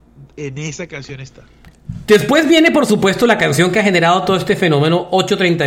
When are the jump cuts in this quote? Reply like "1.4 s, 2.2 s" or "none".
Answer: none